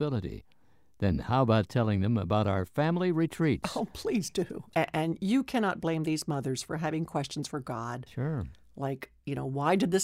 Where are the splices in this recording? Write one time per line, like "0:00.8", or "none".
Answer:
0:04.7

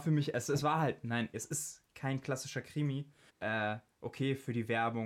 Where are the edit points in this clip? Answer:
0:01.3
0:03.3

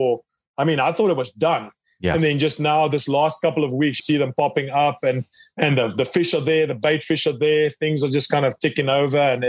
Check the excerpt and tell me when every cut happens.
0:04.0

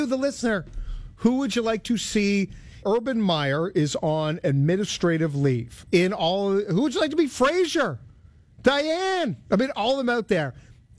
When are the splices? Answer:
0:02.8
0:05.8

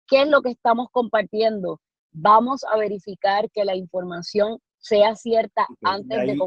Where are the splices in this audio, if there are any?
none

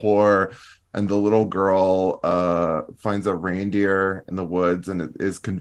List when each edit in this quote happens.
none

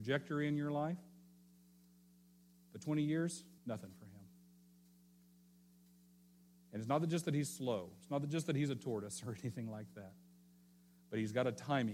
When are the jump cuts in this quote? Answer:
0:03.6

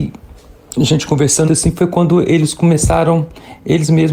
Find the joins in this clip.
0:01.5

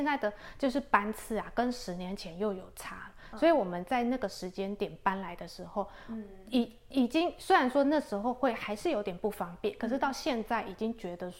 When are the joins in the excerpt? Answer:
none

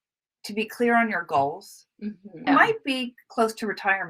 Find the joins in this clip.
0:02.5

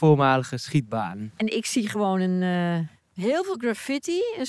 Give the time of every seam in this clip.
none

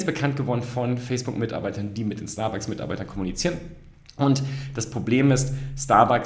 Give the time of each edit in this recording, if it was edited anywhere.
none

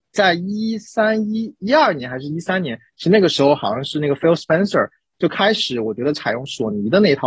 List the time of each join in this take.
none

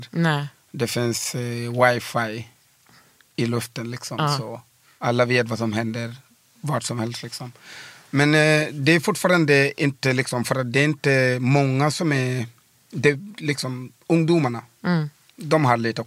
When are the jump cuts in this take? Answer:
none

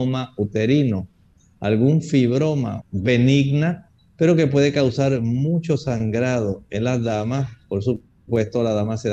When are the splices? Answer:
0:02.8

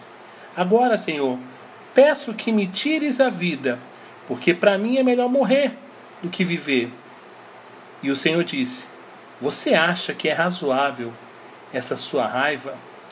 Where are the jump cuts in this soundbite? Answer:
none

